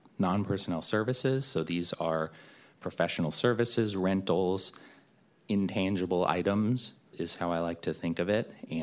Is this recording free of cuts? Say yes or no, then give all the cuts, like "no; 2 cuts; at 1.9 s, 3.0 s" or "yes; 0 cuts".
no; 1 cut; at 7.1 s